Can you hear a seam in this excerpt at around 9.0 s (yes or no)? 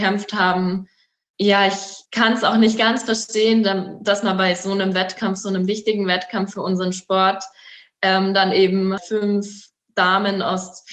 yes